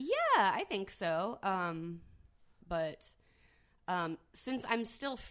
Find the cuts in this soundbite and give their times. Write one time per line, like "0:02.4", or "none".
0:02.6